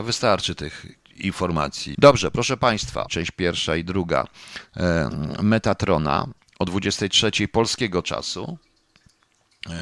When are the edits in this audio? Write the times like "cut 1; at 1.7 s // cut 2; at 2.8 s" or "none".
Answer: cut 1; at 1.9 s // cut 2; at 3.1 s